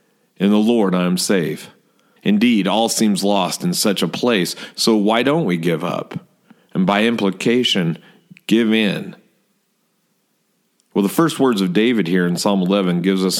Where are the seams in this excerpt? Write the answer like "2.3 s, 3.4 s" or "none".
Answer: 2.2 s